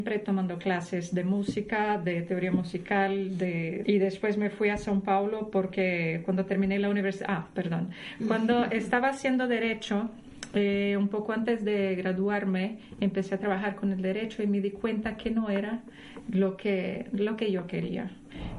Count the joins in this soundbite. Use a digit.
1